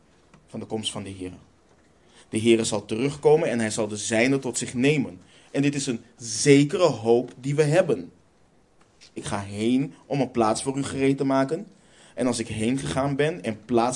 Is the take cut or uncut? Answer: cut